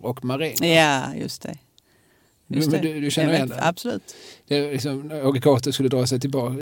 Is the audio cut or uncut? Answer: uncut